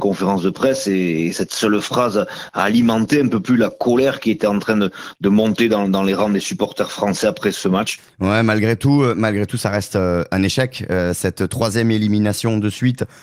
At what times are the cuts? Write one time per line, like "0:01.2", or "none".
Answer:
none